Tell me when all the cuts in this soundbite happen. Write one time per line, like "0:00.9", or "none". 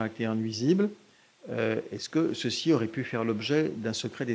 none